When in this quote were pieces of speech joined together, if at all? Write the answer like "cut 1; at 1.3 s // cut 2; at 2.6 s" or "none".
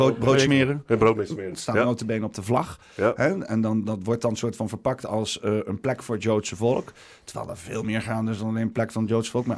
cut 1; at 1.5 s